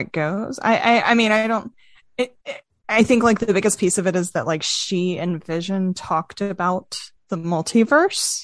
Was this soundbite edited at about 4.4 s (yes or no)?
no